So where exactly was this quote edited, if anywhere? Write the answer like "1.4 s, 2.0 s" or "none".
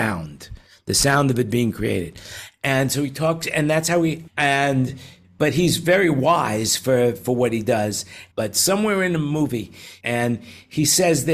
4.3 s, 8.3 s, 10.0 s